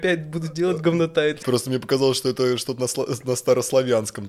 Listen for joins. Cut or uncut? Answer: cut